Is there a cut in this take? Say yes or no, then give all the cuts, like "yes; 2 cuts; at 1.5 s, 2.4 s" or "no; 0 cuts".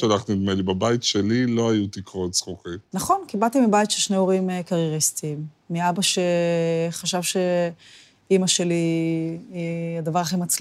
no; 0 cuts